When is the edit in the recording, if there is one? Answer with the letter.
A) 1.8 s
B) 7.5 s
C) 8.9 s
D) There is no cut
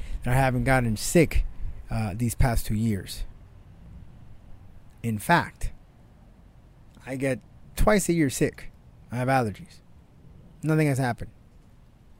D